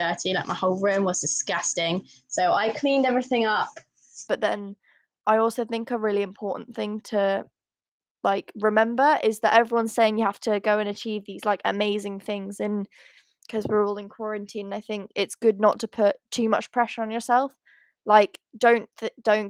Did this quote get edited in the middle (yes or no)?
yes